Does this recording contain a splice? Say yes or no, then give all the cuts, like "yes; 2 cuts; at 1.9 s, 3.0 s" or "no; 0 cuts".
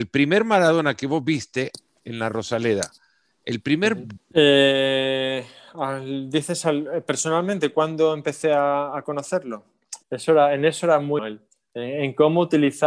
yes; 3 cuts; at 4.2 s, 10.0 s, 11.2 s